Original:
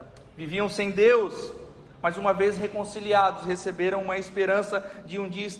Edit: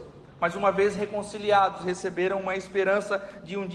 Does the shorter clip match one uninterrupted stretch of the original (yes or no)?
yes